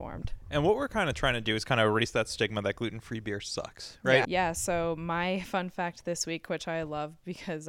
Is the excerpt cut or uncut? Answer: cut